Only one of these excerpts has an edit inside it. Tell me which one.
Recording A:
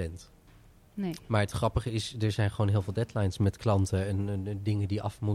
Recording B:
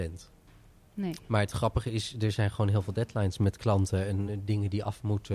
B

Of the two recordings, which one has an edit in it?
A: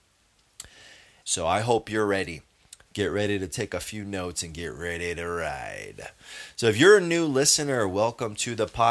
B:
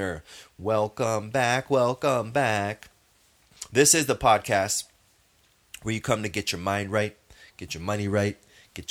A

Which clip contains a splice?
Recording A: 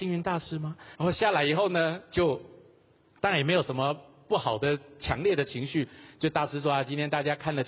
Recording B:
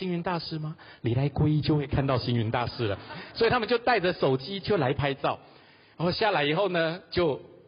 A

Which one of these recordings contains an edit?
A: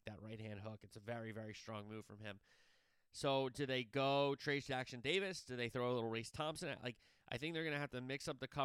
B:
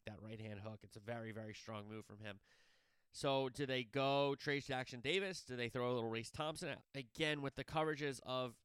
B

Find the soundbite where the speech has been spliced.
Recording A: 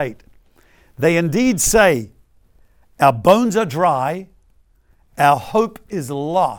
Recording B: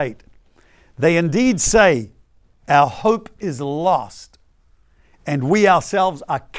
B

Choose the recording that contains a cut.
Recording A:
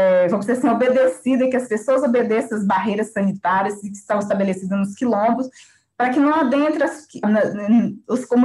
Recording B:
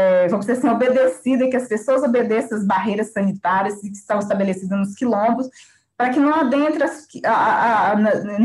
A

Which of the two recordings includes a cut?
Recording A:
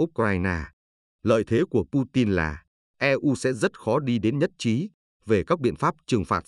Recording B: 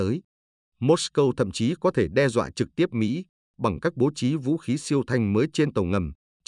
A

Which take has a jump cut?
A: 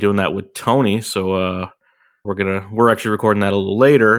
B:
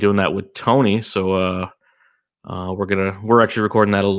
A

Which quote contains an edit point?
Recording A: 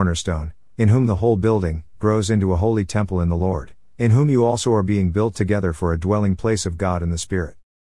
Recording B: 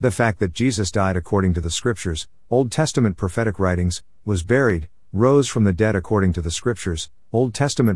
A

